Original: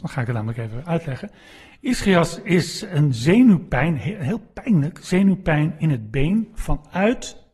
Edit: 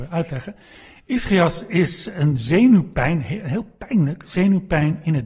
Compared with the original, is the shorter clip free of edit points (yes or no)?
yes